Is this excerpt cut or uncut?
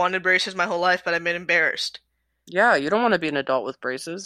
uncut